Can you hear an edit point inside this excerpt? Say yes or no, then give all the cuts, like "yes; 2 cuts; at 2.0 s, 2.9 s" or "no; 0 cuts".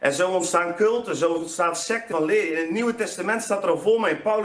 yes; 1 cut; at 2.1 s